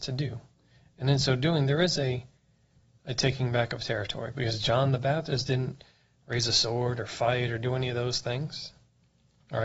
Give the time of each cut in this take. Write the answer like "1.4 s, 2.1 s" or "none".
none